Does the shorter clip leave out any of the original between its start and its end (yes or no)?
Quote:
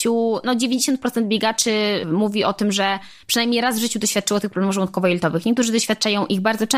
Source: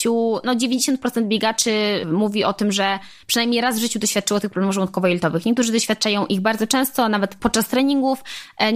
no